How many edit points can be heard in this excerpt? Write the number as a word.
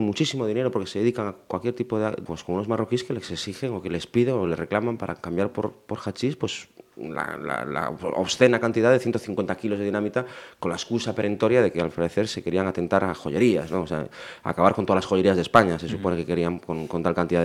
one